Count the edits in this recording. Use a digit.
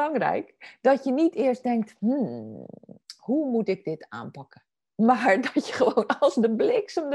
0